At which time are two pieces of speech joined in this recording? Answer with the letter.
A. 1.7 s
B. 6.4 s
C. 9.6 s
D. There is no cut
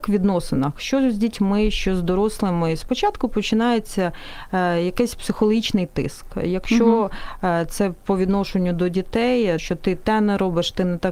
C